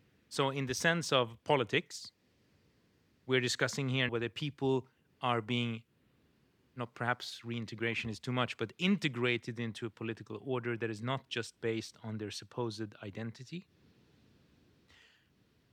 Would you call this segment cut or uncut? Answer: cut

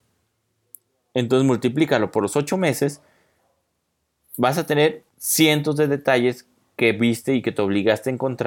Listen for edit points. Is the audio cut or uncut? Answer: cut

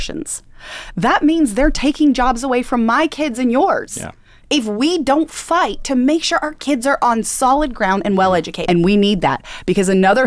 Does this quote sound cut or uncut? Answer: cut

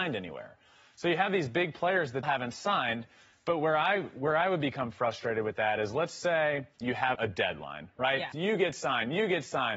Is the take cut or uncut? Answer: cut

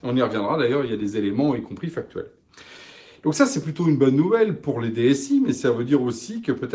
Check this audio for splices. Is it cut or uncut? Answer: uncut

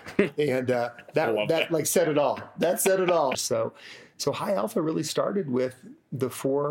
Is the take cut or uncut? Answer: cut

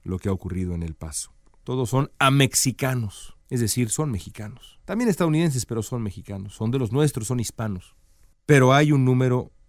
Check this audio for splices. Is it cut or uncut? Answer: cut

